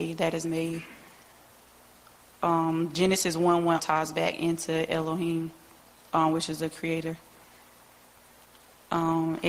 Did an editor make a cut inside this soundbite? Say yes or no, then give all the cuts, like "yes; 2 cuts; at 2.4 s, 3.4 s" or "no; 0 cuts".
yes; 1 cut; at 3.8 s